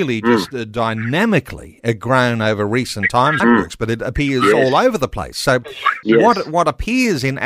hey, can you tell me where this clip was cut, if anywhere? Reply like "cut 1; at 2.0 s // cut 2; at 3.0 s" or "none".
cut 1; at 3.4 s // cut 2; at 6.0 s